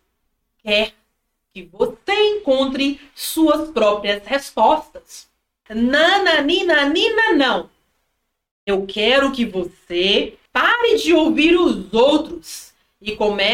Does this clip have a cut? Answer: yes; 2 cuts; at 5.7 s, 10.5 s

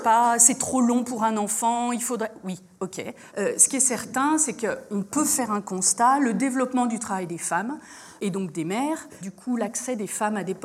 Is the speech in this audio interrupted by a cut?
yes; 2 cuts; at 3.3 s, 9.2 s

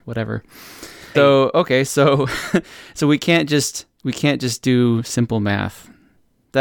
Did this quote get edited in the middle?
yes; 1 cut; at 1.1 s

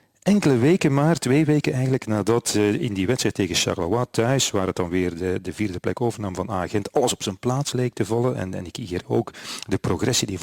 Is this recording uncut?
yes; 0 cuts

